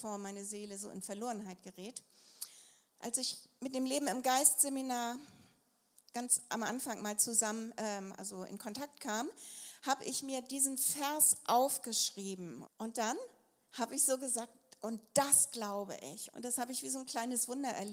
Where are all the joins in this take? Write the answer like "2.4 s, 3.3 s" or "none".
12.6 s, 16.3 s